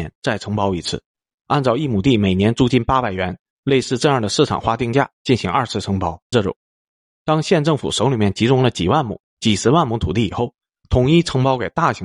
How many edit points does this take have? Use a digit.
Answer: 1